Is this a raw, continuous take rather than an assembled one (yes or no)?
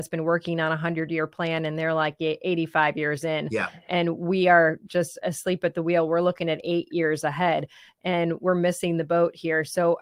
yes